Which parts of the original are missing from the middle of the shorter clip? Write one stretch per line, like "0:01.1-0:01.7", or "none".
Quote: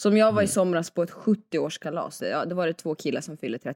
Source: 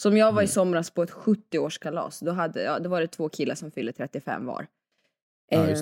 0:02.2-0:02.5